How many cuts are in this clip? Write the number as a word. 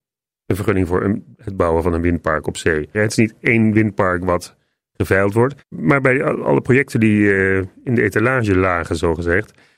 two